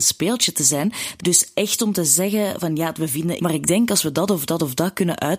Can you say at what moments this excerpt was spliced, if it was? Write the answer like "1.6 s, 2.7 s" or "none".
1.2 s, 3.4 s